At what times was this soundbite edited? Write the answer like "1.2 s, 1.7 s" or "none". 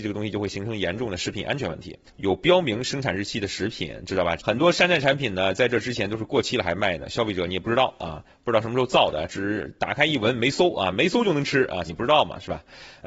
2.1 s, 4.4 s, 11.8 s

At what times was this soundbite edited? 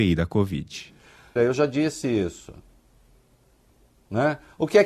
1.4 s

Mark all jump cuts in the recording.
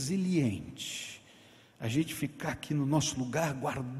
none

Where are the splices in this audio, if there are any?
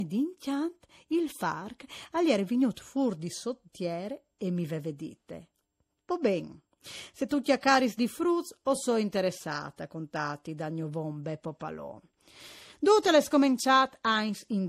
none

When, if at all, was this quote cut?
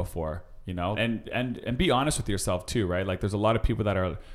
0.9 s

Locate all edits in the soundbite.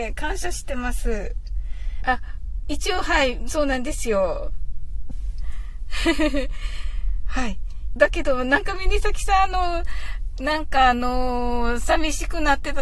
2.0 s, 5.1 s, 8.0 s

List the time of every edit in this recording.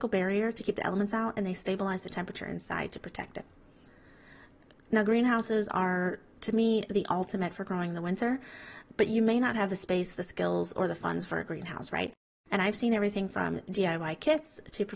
none

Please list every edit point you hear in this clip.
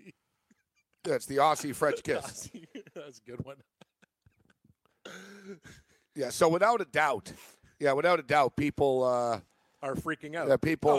none

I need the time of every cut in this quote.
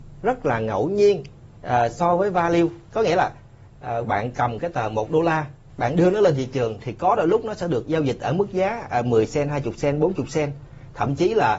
4.0 s, 7.8 s

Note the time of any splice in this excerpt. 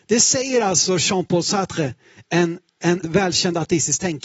3.0 s

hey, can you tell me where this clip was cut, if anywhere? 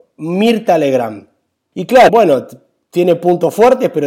2.1 s

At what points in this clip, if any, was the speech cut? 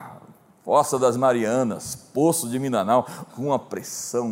3.3 s

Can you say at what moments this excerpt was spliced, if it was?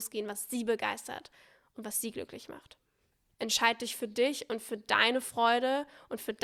3.3 s

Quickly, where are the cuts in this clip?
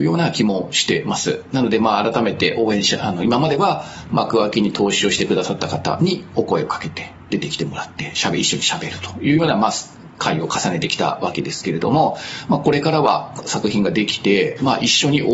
none

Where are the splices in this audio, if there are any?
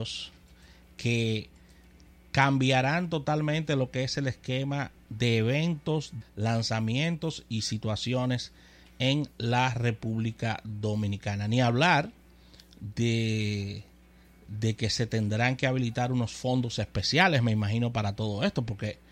6.2 s

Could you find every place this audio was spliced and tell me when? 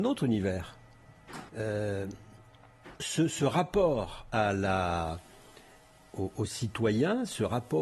1.5 s, 3.0 s

